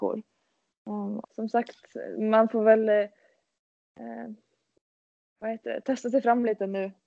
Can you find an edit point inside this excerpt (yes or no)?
yes